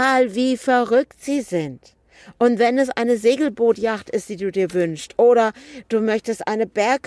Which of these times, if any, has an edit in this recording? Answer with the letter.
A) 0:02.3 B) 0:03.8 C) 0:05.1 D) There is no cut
D